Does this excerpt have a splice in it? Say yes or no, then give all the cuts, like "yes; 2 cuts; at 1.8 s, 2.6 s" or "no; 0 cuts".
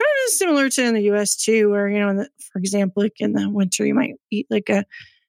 no; 0 cuts